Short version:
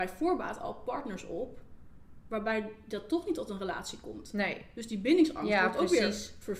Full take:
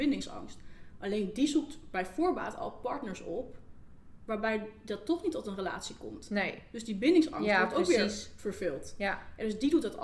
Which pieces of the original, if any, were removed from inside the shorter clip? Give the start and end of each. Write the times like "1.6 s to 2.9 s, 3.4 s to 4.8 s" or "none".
none